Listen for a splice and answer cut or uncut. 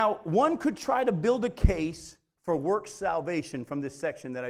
uncut